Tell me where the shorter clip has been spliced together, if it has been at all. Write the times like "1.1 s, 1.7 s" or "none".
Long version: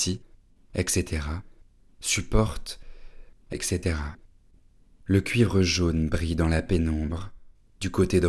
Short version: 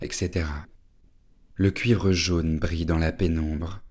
none